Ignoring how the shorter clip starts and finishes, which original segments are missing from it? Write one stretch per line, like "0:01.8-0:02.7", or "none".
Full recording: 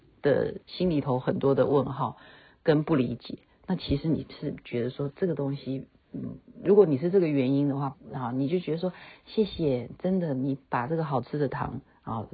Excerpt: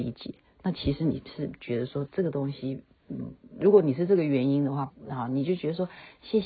none

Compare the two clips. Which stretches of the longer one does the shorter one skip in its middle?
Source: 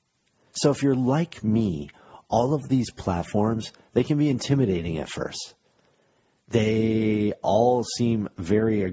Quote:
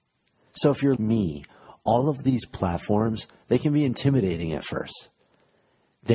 0:01.0-0:01.4

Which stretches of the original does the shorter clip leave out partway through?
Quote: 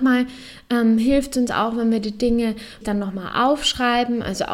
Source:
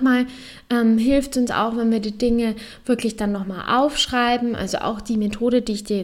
0:02.8-0:03.1

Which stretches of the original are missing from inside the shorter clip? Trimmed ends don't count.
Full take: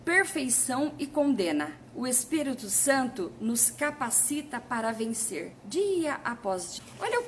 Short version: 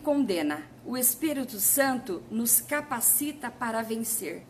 none

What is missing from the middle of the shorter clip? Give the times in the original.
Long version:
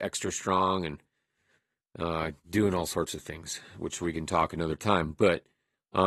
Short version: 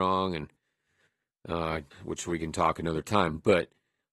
0:02.4-0:03.7

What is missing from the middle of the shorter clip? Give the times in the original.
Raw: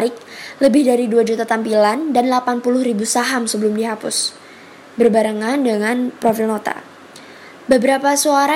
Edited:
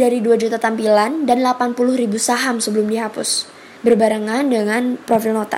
0:04.6-0:04.9

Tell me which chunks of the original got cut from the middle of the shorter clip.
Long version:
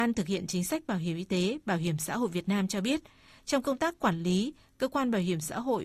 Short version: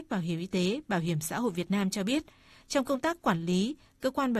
none

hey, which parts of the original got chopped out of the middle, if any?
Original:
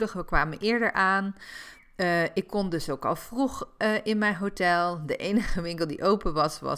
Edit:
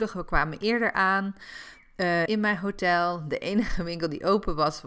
0:02.3-0:04.0

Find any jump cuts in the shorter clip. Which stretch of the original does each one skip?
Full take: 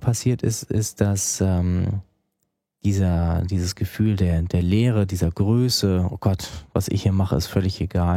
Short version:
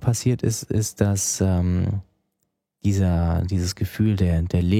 none

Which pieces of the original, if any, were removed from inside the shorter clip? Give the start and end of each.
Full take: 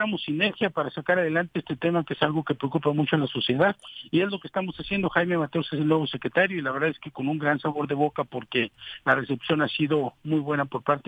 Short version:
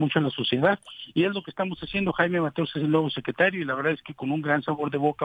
none

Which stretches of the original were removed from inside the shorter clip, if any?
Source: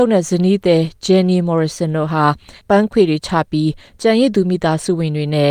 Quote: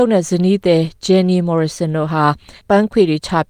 none

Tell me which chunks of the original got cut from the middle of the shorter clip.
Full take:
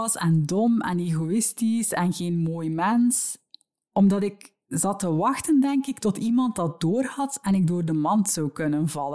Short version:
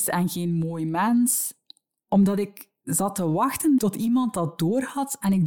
0:05.6-0:06.0

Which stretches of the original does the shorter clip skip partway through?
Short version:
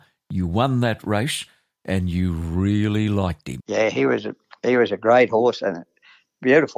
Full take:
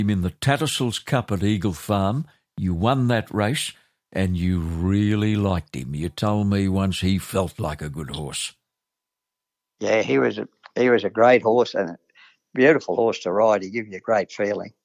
0:05.9-0:09.7

